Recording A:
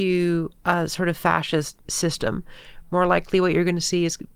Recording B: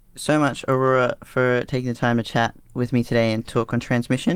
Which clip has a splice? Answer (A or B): A